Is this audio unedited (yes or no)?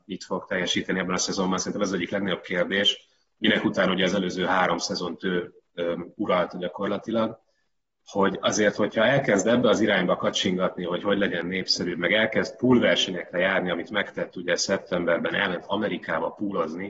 yes